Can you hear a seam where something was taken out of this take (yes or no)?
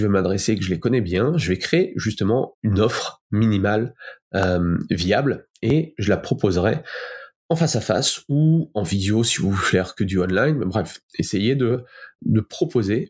yes